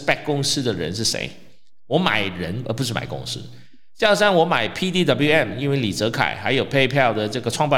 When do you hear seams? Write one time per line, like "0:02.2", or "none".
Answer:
none